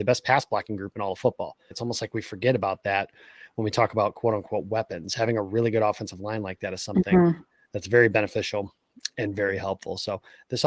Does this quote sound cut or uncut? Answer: cut